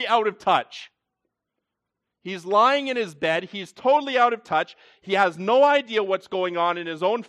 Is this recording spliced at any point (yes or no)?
no